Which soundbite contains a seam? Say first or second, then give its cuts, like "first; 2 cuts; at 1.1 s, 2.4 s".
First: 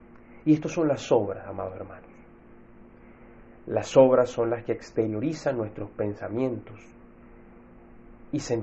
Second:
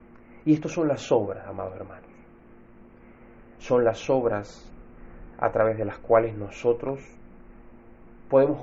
second; 1 cut; at 3.6 s